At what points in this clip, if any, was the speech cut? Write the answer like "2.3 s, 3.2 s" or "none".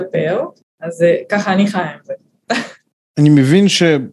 none